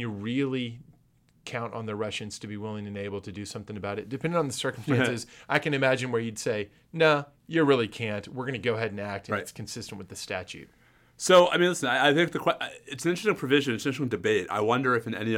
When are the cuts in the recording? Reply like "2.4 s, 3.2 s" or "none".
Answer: none

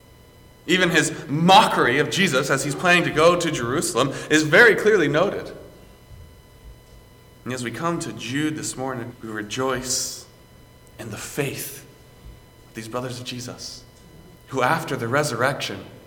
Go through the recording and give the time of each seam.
9.1 s, 14.4 s

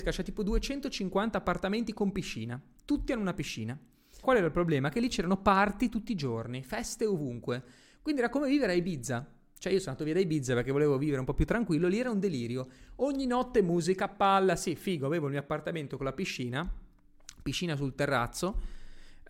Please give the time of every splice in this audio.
4.2 s

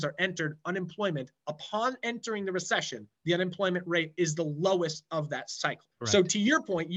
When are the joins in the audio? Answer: 5.9 s

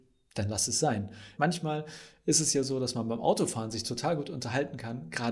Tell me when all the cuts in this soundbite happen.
1.3 s

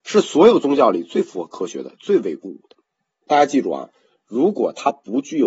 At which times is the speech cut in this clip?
3.2 s

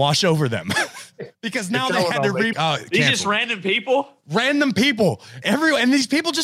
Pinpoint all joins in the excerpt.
2.5 s, 5.4 s

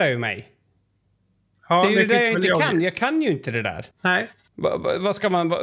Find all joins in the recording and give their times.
3.9 s

